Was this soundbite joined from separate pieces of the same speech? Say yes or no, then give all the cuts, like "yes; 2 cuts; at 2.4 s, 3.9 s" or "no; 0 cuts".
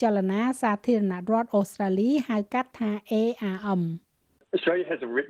no; 0 cuts